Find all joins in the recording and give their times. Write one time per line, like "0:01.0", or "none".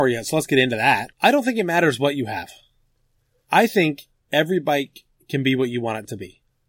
0:01.1